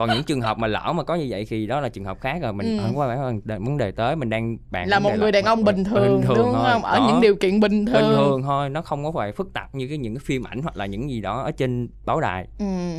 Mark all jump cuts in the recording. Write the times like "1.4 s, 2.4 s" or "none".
none